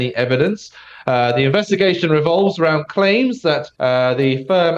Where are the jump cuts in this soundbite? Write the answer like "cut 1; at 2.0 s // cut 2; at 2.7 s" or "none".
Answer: cut 1; at 3.7 s